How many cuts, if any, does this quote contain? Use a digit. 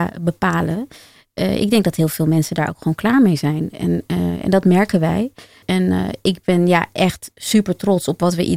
0